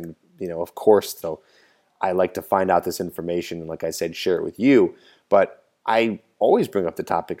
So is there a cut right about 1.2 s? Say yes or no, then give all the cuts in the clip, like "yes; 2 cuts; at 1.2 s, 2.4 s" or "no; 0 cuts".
yes; 1 cut; at 1.2 s